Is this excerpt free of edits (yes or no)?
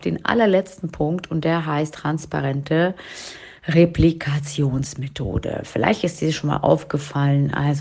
yes